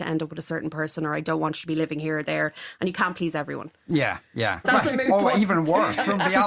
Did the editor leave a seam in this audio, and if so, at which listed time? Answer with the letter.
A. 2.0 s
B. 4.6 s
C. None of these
B